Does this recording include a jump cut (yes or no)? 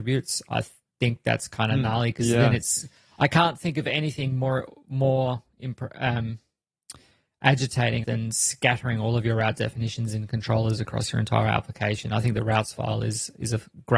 yes